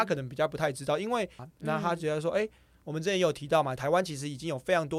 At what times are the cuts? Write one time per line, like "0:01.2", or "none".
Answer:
0:01.4
0:03.8